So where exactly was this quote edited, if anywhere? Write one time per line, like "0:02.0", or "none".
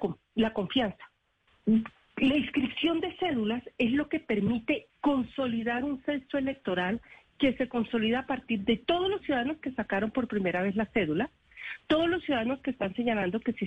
0:01.5
0:04.9

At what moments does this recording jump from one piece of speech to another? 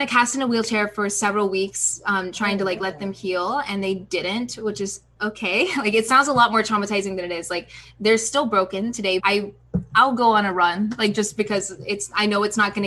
0:09.2

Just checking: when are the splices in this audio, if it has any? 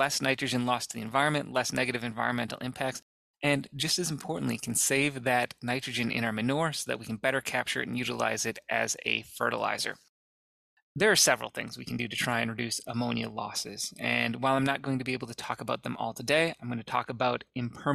none

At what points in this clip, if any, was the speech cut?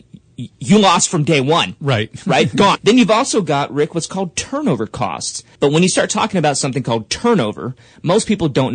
0:02.8
0:05.6

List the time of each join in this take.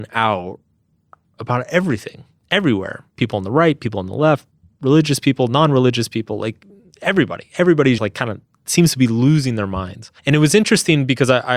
0:08.0
0:10.2

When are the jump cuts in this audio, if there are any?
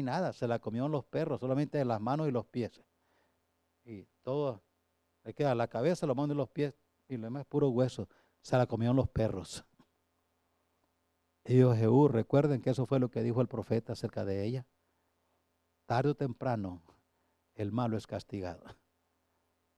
none

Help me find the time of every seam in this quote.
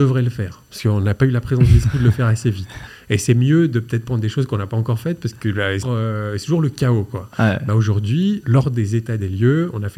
0:05.8
0:08.4

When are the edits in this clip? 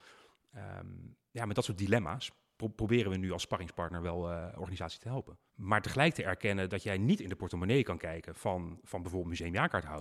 0:05.5

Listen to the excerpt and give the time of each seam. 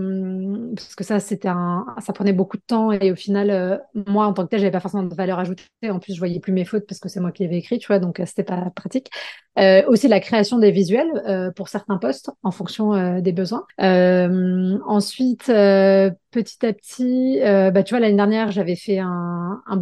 none

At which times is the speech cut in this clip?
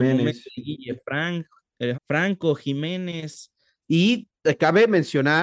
0:01.9
0:03.8

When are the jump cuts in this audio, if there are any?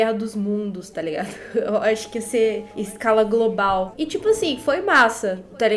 0:03.9

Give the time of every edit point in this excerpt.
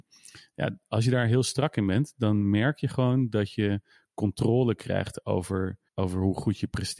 0:05.9

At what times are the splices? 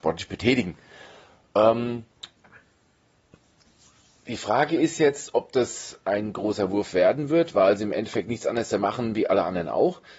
none

